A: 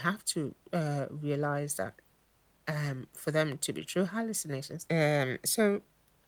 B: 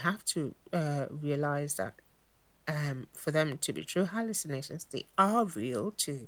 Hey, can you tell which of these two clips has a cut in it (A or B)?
A